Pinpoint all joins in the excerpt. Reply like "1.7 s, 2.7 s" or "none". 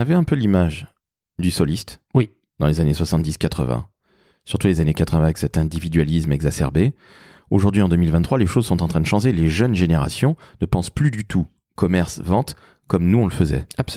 none